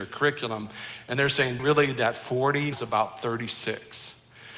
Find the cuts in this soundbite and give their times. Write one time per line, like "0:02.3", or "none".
0:01.6
0:02.7